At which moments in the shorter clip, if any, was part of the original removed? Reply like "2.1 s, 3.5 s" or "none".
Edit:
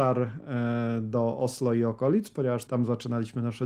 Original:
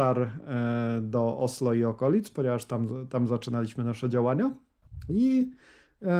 2.7 s